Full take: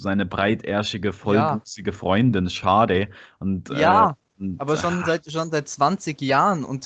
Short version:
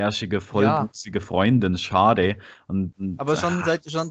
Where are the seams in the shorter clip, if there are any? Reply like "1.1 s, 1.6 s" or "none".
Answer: 2.9 s